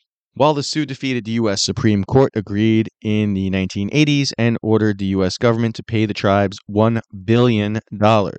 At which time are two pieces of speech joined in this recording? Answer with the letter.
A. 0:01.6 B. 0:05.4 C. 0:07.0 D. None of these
A